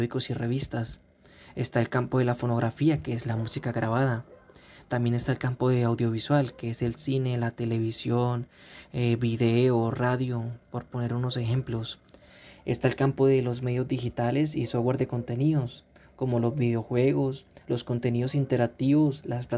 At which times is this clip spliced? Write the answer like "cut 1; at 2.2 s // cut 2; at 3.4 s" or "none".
none